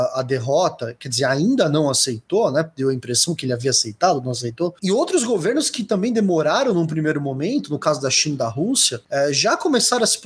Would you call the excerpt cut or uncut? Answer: uncut